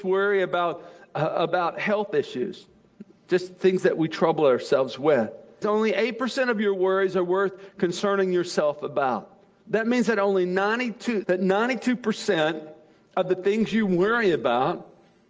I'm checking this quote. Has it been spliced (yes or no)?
yes